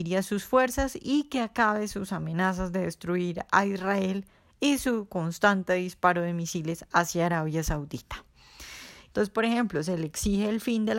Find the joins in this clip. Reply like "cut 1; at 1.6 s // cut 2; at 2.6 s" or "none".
cut 1; at 9.1 s